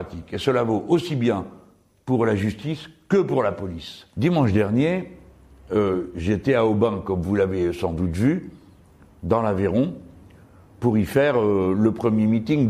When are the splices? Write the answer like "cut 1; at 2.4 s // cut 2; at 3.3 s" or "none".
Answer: cut 1; at 4.1 s